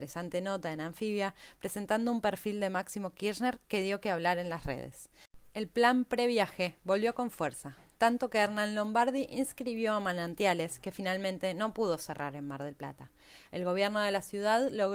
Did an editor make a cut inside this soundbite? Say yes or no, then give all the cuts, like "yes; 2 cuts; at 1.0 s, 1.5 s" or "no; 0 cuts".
yes; 1 cut; at 5.5 s